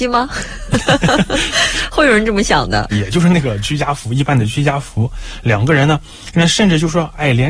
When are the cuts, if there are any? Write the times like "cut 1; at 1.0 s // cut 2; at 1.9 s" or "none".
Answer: cut 1; at 2.9 s

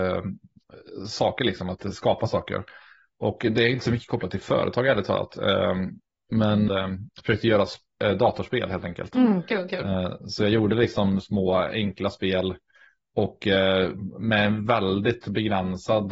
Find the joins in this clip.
cut 1; at 6.7 s

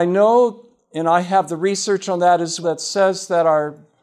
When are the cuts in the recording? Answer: cut 1; at 2.6 s

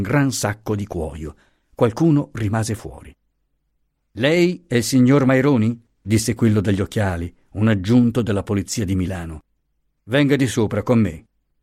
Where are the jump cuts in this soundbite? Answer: none

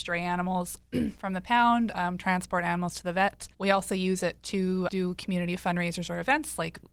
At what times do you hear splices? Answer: cut 1; at 3.5 s // cut 2; at 4.9 s

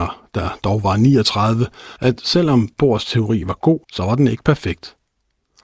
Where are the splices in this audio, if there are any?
cut 1; at 2.0 s // cut 2; at 3.8 s

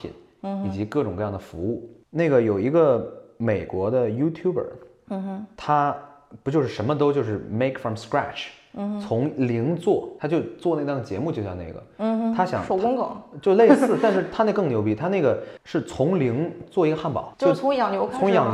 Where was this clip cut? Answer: cut 1; at 2.1 s

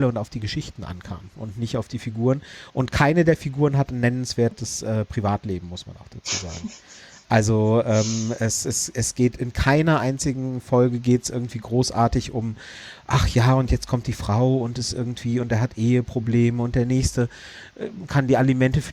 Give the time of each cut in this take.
none

